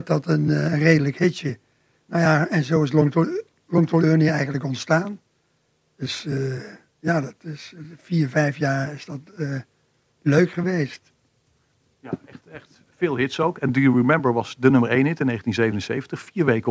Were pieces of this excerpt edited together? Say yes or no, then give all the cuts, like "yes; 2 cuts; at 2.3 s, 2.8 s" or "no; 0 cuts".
no; 0 cuts